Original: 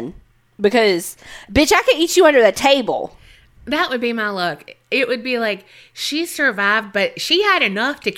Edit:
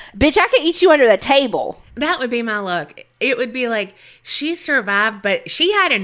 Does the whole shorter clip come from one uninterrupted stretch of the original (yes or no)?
no